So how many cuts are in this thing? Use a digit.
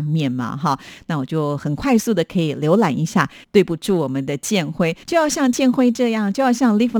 2